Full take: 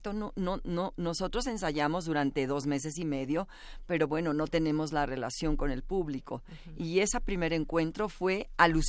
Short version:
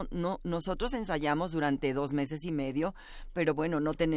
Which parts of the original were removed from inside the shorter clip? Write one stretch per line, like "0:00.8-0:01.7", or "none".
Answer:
none